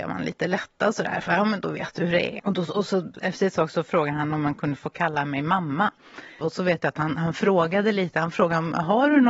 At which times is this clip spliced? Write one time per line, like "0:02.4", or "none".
0:02.4
0:06.4